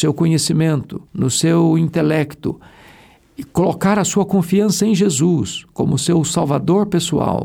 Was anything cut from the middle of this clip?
yes; 1 cut; at 1.1 s

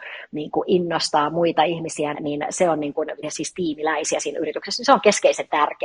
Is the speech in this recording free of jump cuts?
no; 2 cuts; at 2.1 s, 3.2 s

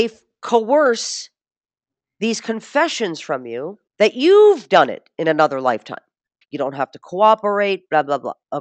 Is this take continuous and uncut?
no; 2 cuts; at 3.9 s, 6.4 s

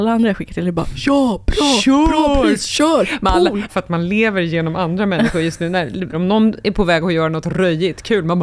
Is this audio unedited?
no; 2 cuts; at 3.7 s, 6.1 s

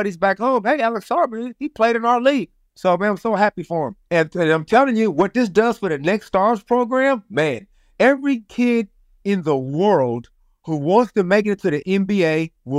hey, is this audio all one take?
yes; 0 cuts

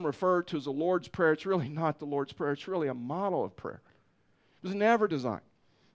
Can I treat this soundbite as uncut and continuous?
yes; 0 cuts

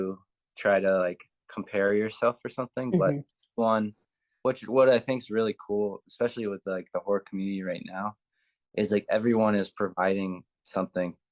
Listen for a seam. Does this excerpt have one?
no; 0 cuts

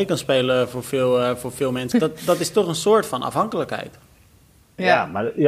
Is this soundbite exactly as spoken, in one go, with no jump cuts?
no; 1 cut; at 1.9 s

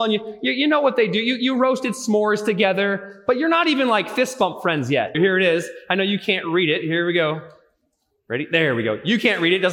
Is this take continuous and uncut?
no; 1 cut; at 5.1 s

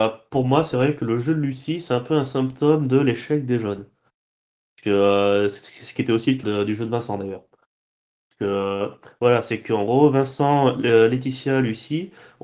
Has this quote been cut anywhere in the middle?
yes; 1 cut; at 6.4 s

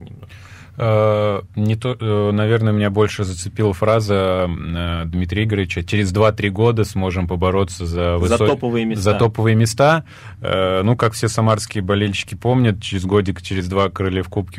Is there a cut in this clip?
no; 0 cuts

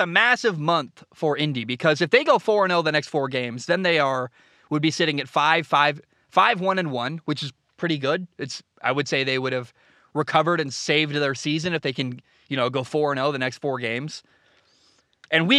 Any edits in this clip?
no; 0 cuts

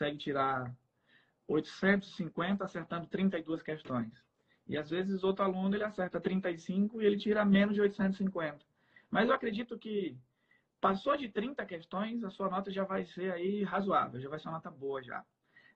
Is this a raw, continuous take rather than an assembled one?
yes; 0 cuts

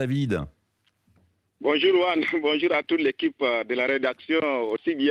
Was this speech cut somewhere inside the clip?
no; 0 cuts

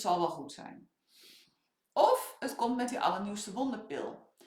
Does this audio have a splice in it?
no; 0 cuts

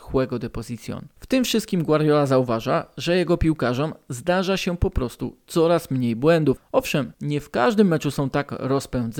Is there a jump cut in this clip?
no; 0 cuts

